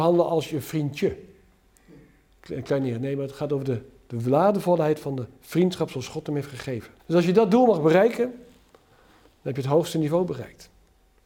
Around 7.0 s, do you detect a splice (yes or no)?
yes